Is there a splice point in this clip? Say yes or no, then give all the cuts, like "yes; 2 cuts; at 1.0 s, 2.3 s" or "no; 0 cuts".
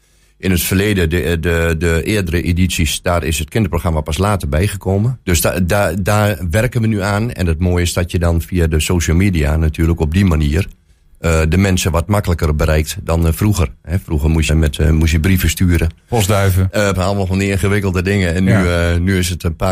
yes; 3 cuts; at 5.2 s, 14.5 s, 16.9 s